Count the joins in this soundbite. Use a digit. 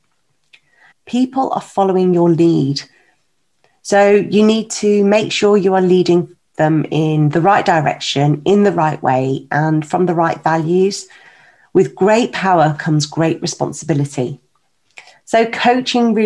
1